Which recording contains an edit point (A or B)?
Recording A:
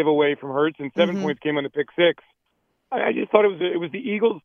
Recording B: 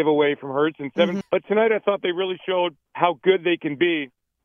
B